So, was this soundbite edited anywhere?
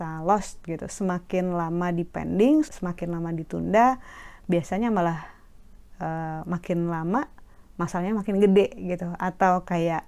yes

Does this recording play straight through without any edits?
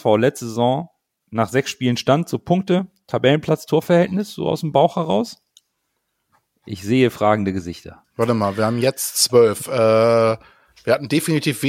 yes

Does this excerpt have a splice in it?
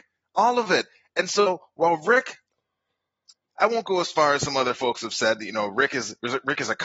no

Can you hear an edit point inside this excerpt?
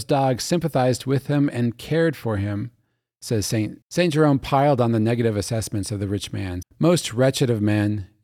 yes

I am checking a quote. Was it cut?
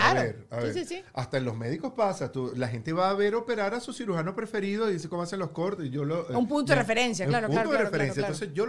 no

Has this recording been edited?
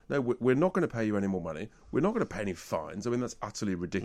no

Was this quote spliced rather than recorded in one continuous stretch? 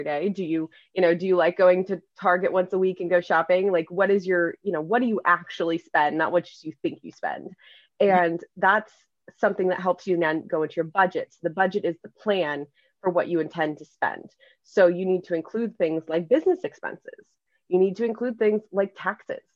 no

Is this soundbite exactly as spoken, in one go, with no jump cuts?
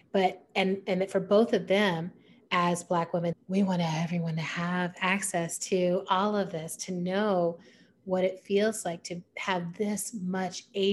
no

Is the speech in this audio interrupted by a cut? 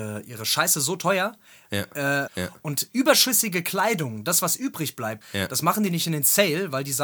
yes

